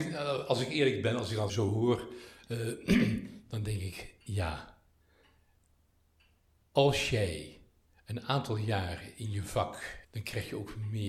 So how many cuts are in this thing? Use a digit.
2